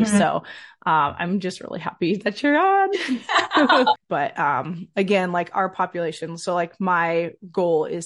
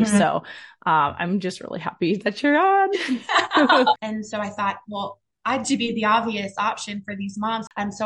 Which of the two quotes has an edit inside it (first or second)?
second